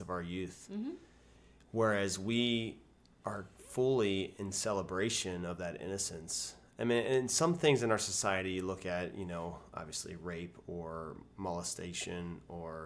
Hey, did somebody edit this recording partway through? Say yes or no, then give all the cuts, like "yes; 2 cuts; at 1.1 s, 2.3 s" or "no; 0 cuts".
no; 0 cuts